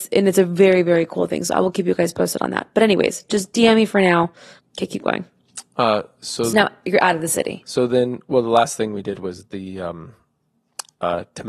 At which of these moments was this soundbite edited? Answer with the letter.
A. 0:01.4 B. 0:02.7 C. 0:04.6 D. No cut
C